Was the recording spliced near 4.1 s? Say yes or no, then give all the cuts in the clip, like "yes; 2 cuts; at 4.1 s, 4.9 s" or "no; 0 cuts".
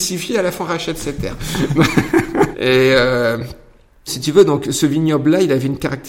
yes; 2 cuts; at 2.5 s, 4.1 s